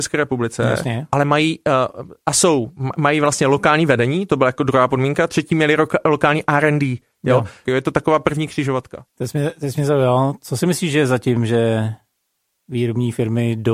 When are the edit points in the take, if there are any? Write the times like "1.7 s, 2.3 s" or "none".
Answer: 7.7 s